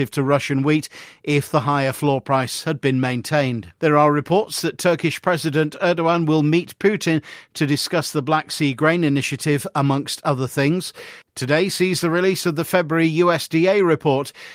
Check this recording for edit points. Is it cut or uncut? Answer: cut